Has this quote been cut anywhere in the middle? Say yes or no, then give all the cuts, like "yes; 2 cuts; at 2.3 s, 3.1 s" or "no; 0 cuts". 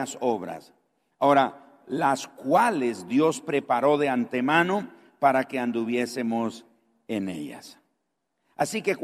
no; 0 cuts